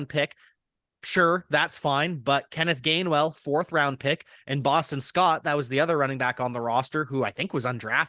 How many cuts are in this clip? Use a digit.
0